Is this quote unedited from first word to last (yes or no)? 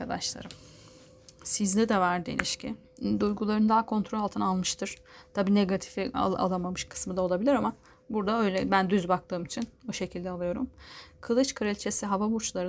no